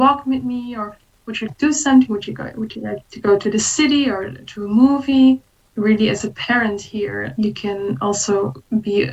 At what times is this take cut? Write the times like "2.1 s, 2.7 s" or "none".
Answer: 1.5 s